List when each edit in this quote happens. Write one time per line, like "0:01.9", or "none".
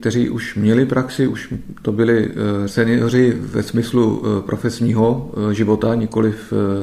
0:02.7